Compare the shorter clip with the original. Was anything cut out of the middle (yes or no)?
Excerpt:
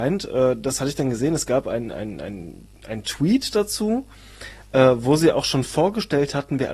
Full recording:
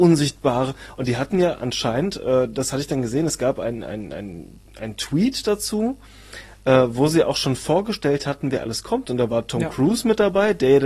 no